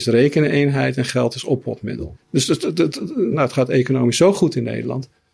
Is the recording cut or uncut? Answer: cut